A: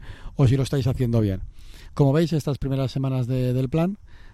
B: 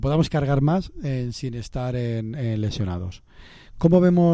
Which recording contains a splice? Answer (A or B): A